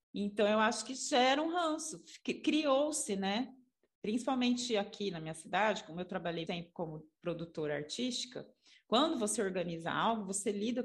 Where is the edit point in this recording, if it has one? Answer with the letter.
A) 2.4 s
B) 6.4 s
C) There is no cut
B